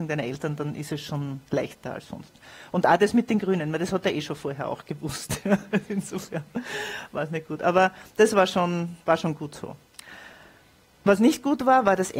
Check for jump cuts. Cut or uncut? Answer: uncut